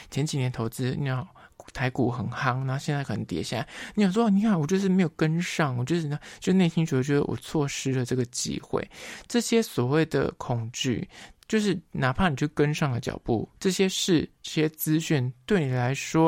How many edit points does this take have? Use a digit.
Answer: 1